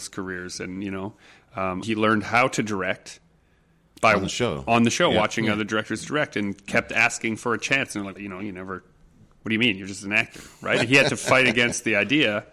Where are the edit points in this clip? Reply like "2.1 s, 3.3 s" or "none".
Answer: 1.8 s, 8.2 s